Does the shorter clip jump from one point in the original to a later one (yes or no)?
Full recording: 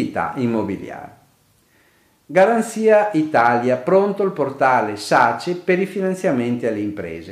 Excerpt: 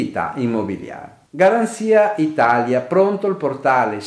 yes